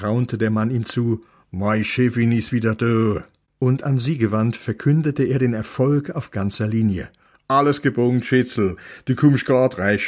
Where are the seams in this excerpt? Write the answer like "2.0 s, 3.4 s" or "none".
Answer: none